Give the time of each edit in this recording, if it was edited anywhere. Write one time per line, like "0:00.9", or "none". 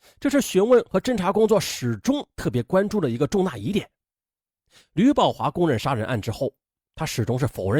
none

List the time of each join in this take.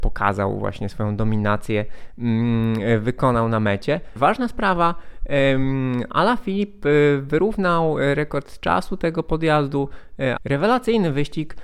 0:04.2
0:10.4

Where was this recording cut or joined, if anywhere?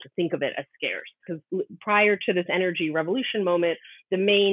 0:01.3

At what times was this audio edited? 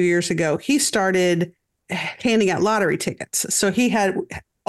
0:01.8

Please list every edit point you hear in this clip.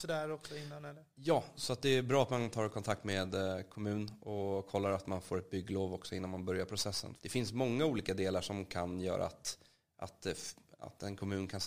0:07.2

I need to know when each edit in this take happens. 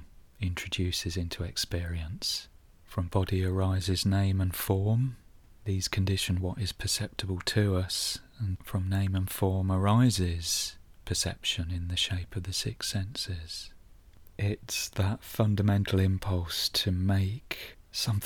0:08.6
0:14.2

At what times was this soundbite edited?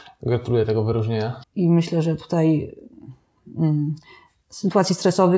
0:01.4

